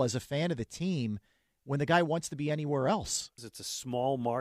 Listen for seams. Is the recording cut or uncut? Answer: cut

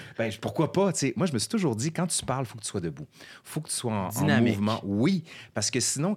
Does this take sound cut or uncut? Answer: uncut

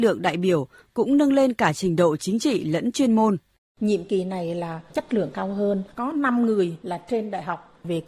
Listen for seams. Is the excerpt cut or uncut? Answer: uncut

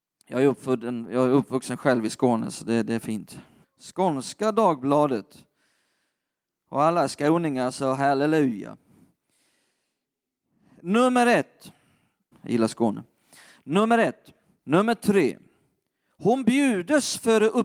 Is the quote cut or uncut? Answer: cut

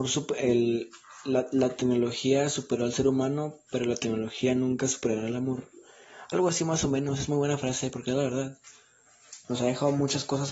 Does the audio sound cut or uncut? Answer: cut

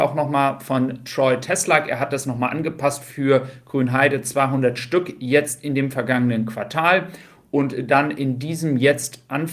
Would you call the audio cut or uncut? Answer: uncut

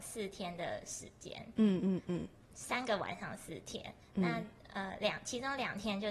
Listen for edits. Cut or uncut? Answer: uncut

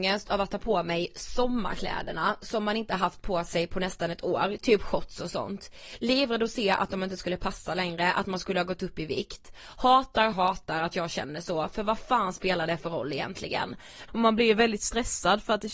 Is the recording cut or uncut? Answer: cut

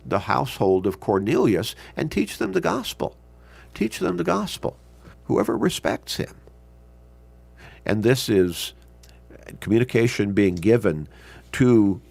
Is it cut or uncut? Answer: cut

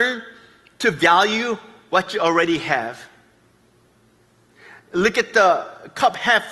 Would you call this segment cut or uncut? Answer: uncut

